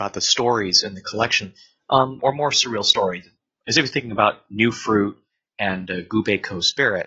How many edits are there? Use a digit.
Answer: 1